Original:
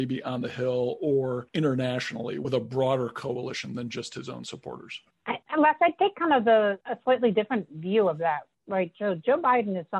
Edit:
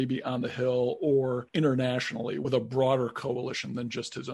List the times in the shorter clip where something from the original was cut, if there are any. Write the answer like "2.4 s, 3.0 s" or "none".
none

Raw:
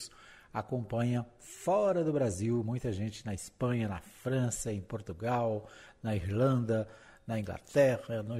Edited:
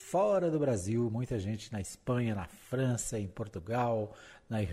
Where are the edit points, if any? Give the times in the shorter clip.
none

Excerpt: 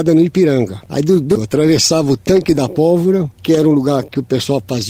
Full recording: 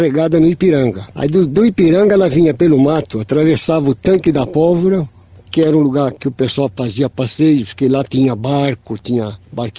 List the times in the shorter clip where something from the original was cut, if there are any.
1.4 s, 3.3 s

